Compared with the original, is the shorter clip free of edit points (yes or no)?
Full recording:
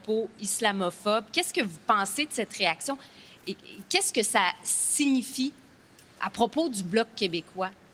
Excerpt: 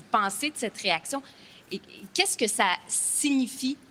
yes